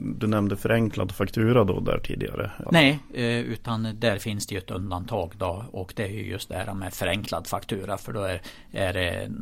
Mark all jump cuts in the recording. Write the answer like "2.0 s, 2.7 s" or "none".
2.6 s